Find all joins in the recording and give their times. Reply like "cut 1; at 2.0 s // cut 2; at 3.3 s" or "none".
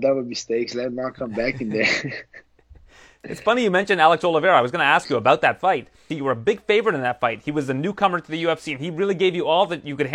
cut 1; at 6.1 s